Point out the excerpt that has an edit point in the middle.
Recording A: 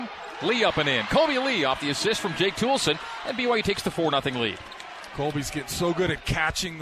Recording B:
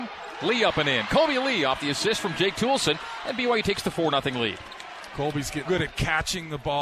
B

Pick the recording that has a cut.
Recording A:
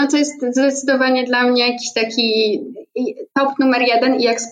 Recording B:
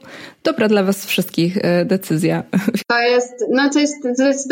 B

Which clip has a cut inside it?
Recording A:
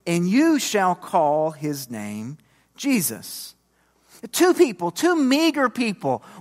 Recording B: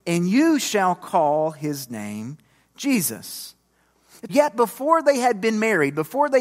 B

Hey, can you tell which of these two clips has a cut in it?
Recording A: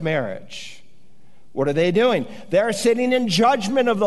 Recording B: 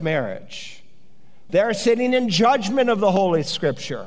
B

